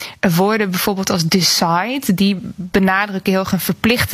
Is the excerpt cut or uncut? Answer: uncut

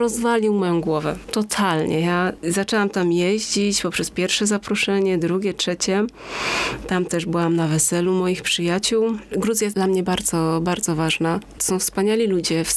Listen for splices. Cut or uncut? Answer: uncut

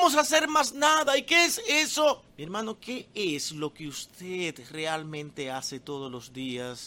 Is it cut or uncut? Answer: cut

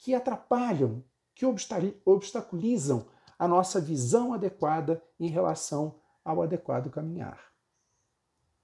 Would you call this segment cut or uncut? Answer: uncut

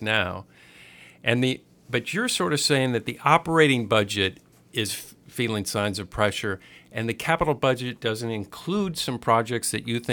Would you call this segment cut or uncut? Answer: uncut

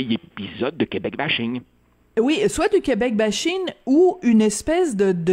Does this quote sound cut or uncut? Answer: uncut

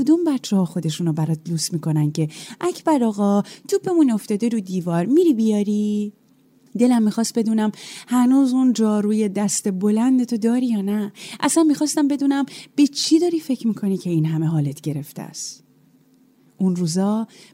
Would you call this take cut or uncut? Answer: uncut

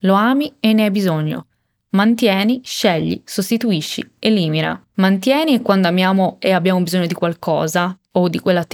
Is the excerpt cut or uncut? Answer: cut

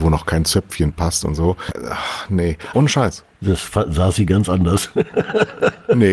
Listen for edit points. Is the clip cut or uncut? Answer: cut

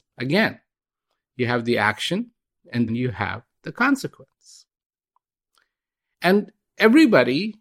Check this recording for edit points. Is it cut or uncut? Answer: cut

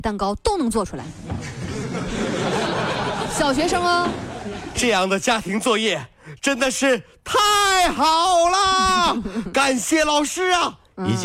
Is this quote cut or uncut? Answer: uncut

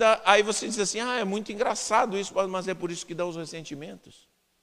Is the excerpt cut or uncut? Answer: uncut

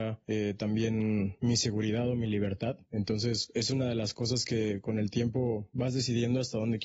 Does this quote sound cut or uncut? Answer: uncut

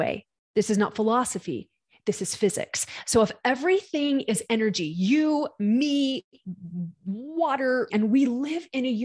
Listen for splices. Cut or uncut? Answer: cut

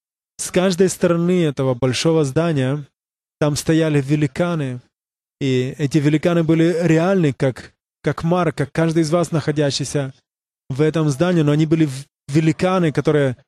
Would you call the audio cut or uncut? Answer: uncut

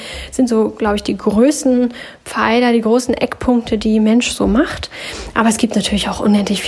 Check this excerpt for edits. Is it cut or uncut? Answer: uncut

